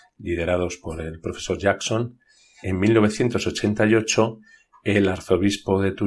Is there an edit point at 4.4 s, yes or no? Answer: no